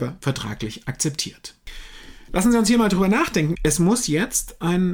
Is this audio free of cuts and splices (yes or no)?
no